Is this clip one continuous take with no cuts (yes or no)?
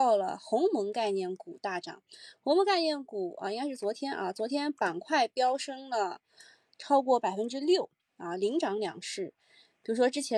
yes